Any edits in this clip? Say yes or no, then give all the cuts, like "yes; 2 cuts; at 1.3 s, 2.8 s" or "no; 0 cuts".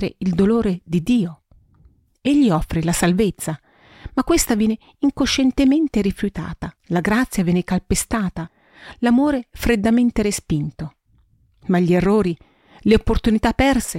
yes; 1 cut; at 6.8 s